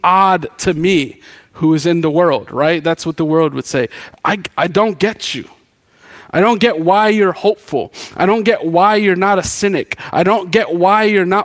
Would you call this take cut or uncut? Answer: uncut